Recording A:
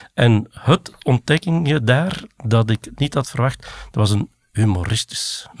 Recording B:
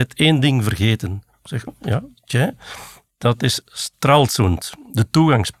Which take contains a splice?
B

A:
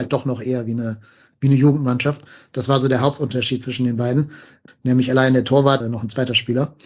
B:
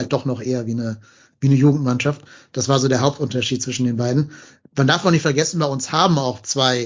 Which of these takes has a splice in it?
A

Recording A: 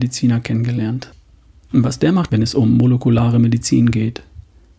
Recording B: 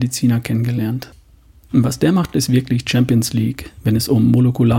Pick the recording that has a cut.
A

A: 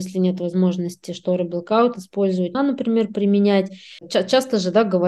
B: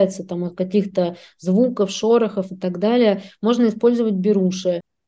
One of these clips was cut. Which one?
A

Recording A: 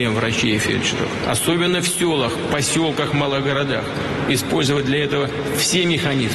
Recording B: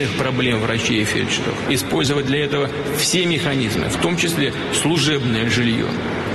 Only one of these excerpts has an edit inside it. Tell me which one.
B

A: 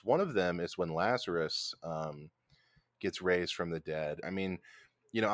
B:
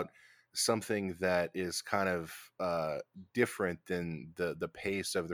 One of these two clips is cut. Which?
A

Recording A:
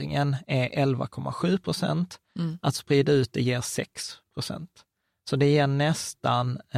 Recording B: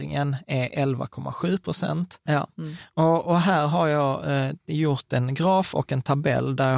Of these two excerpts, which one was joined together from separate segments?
B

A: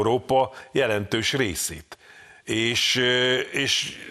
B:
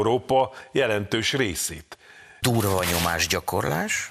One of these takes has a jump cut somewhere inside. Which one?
B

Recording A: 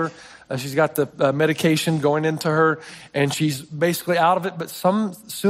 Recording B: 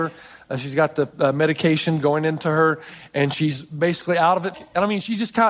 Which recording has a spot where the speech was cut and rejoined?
B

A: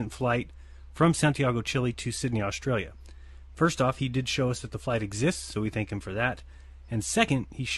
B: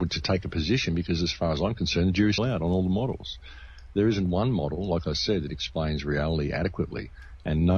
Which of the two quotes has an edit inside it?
B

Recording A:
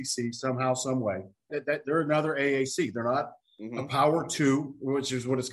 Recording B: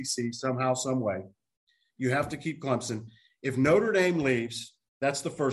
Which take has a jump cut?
A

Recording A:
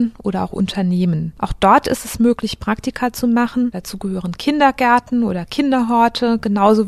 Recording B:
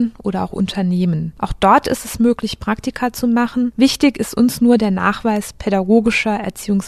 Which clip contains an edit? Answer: A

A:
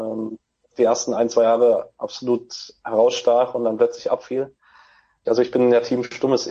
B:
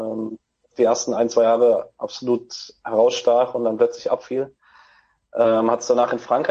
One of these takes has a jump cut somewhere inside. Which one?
A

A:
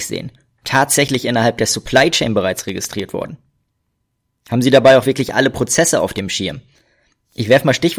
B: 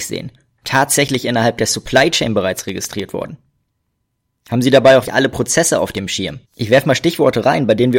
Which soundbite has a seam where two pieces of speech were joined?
B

